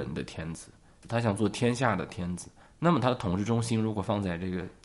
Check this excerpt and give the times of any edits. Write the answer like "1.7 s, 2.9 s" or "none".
1.0 s